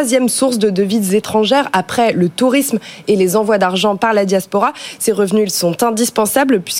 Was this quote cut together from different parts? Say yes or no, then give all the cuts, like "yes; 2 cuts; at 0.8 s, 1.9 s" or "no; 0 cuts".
no; 0 cuts